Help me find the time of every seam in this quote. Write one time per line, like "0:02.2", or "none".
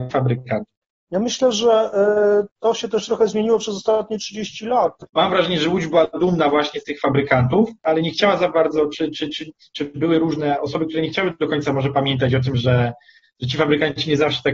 0:05.1